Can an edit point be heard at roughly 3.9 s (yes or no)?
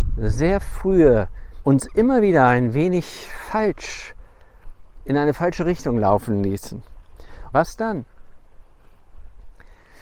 no